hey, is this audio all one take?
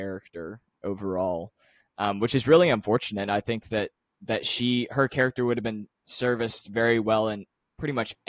yes; 0 cuts

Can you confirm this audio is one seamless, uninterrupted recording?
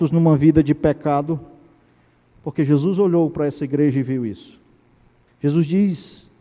no; 1 cut; at 5.3 s

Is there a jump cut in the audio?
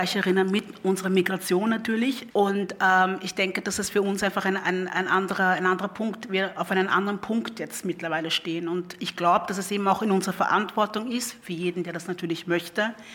yes; 1 cut; at 2.3 s

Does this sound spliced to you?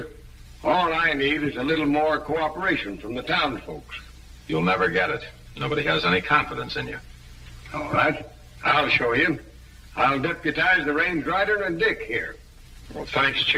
no; 0 cuts

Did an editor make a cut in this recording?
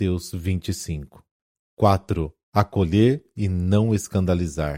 no; 0 cuts

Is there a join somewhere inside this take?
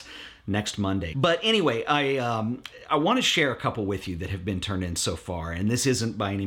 yes; 1 cut; at 1.1 s

